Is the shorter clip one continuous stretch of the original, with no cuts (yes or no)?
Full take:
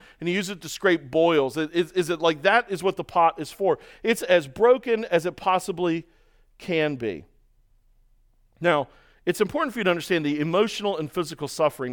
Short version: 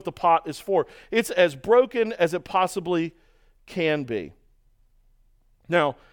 yes